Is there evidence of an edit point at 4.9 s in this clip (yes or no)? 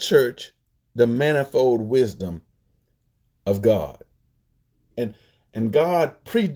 yes